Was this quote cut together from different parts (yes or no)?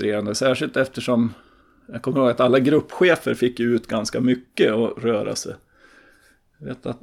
no